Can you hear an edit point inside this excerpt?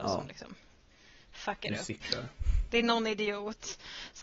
no; 0 cuts

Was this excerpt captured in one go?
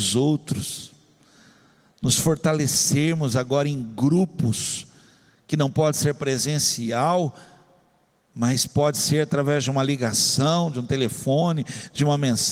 yes; 0 cuts

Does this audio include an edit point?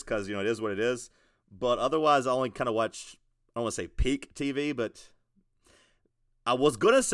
no; 0 cuts

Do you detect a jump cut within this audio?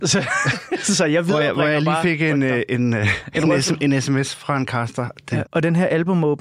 yes; 1 cut; at 5.4 s

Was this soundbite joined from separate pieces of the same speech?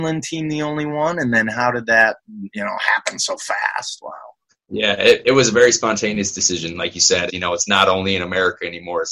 yes; 1 cut; at 7.3 s

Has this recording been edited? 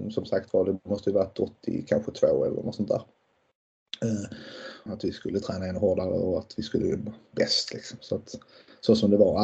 yes; 1 cut; at 4.9 s

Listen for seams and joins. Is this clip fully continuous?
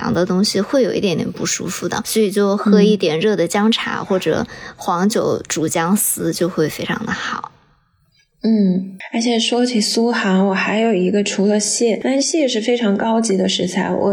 yes; 0 cuts

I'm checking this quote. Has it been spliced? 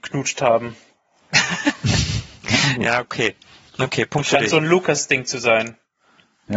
no; 0 cuts

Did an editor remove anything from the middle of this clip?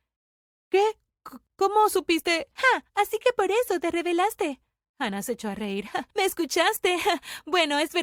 no; 0 cuts

